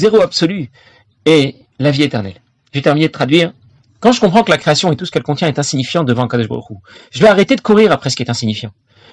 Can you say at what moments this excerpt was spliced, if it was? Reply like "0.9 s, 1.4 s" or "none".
3.9 s